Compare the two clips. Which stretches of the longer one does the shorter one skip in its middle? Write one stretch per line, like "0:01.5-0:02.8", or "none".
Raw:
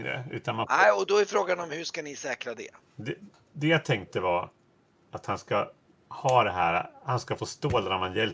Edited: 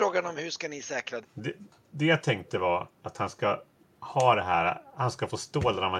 0:02.5-0:02.8
0:04.6-0:05.0